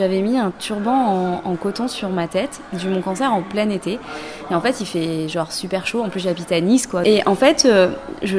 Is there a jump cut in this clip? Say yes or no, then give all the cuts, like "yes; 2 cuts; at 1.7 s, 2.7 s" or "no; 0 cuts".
no; 0 cuts